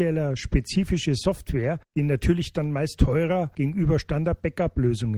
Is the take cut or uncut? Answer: cut